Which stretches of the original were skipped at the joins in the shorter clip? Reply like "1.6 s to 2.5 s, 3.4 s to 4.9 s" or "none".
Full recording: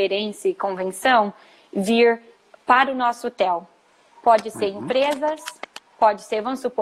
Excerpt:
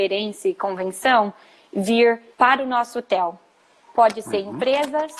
2.3 s to 2.6 s